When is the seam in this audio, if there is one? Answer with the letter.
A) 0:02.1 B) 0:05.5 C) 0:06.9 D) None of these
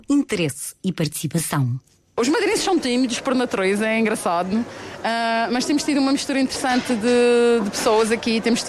D